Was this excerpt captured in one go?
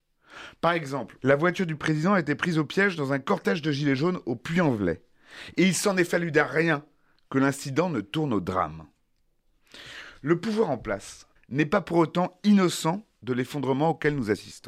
no; 2 cuts; at 1.2 s, 11.4 s

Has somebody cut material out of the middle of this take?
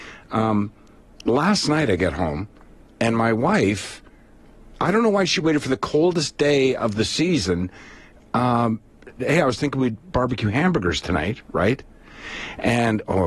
yes; 1 cut; at 9.2 s

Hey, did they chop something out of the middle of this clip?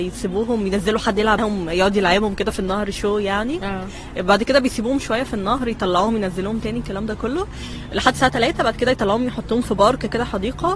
yes; 1 cut; at 1.4 s

